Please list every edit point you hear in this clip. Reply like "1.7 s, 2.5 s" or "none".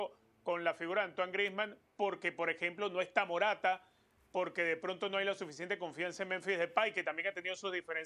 none